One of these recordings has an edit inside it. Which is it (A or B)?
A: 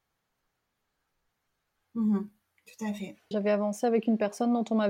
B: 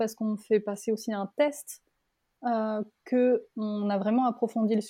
A